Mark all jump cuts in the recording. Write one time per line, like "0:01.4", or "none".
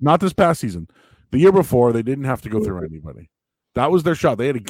none